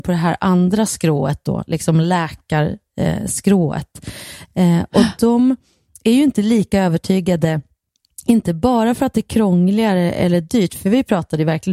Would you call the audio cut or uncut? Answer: uncut